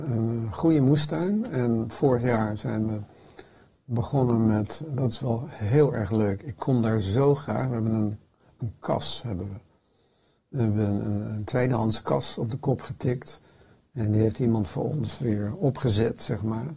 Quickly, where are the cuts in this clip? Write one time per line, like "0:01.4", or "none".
none